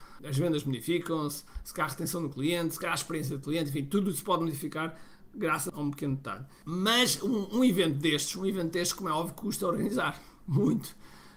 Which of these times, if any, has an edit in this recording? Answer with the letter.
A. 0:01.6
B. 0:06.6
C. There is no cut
C